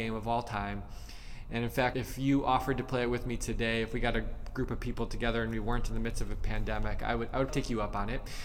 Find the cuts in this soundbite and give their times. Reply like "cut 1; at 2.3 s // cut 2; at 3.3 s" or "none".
cut 1; at 1.9 s // cut 2; at 7.5 s

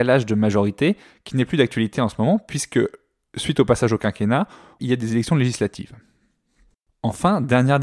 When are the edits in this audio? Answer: cut 1; at 4.8 s

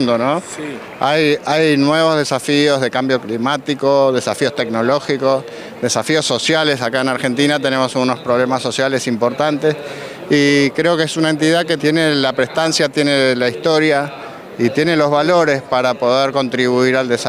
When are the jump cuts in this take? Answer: cut 1; at 11.8 s

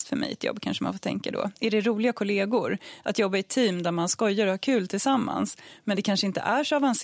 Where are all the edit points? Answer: none

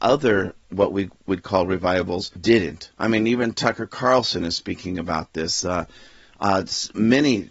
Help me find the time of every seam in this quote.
none

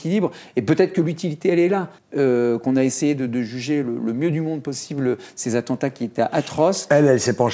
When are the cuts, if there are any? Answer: cut 1; at 2.0 s

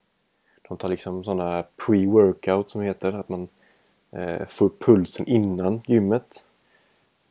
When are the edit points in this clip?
none

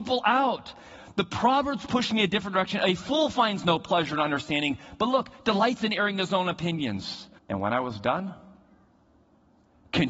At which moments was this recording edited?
cut 1; at 7.4 s

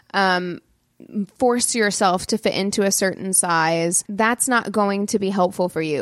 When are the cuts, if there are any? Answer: cut 1; at 4.0 s

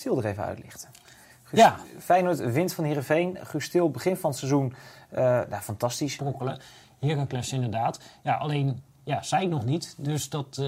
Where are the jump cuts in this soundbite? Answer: cut 1; at 6.2 s

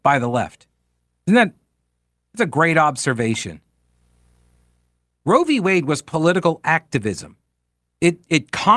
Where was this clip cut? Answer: none

